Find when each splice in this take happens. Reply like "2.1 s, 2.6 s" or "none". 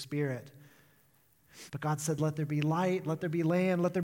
1.7 s